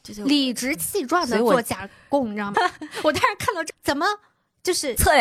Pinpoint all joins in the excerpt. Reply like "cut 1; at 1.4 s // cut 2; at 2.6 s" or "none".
cut 1; at 2.5 s // cut 2; at 3.7 s